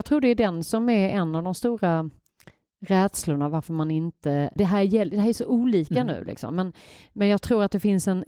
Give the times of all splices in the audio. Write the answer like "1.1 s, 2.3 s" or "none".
4.6 s